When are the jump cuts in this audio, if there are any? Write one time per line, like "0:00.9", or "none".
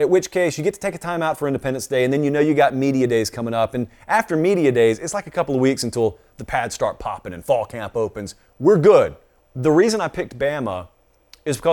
0:09.4